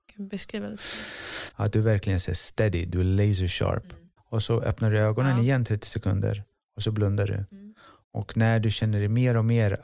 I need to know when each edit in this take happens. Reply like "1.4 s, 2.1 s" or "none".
1.5 s, 4.2 s, 8.0 s